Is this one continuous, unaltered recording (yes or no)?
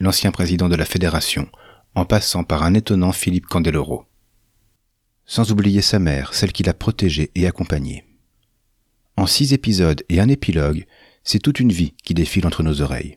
yes